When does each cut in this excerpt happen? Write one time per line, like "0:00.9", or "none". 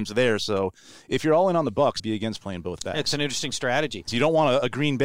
0:02.0
0:04.1